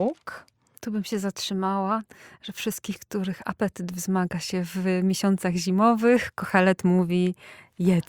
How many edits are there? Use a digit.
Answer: 0